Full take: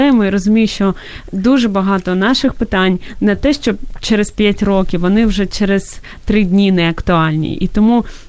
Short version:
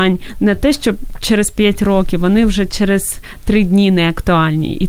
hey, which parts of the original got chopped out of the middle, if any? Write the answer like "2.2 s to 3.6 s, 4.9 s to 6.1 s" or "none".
none